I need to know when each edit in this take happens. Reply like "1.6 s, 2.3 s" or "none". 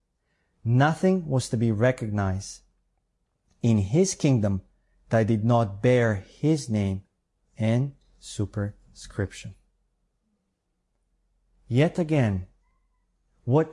none